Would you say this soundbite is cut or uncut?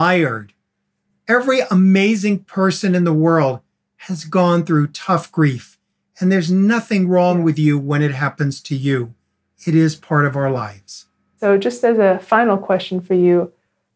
uncut